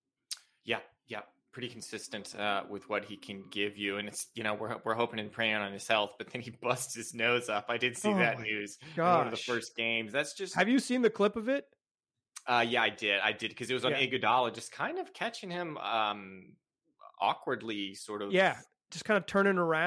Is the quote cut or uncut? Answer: uncut